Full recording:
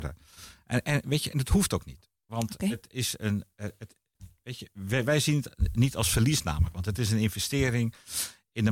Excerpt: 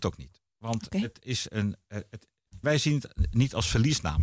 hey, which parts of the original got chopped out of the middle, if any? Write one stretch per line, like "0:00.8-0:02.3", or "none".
0:04.3-0:05.0